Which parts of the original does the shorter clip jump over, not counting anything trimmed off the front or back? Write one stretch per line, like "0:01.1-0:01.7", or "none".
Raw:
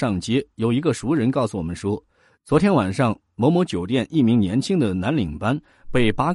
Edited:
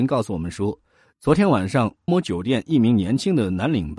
0:03.3-0:03.5